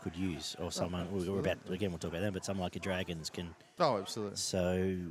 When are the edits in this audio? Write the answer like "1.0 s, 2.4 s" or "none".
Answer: 3.8 s